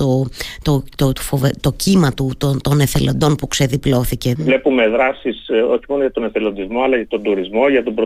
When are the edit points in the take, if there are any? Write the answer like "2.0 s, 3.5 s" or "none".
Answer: 4.4 s